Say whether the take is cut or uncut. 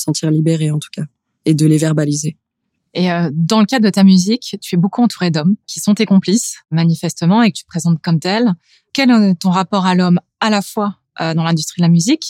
uncut